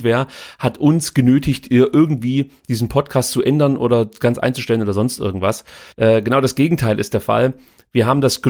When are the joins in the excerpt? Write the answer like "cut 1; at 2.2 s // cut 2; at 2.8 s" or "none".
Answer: cut 1; at 5.9 s